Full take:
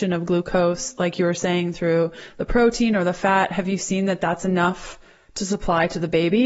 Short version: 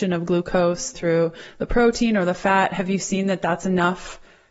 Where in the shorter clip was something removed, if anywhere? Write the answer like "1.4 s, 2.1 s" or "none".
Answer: 0.9 s